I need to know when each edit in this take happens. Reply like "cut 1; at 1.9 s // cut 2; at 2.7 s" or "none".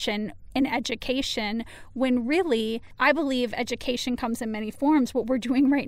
none